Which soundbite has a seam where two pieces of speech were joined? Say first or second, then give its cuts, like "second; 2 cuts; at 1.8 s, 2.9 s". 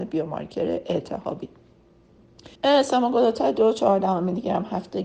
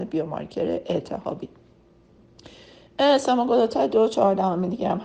first; 1 cut; at 2.5 s